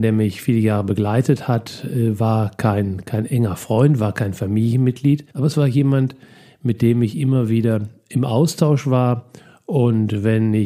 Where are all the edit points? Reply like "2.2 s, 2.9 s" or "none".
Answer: 5.3 s